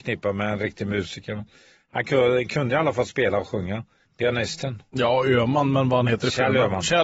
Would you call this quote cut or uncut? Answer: cut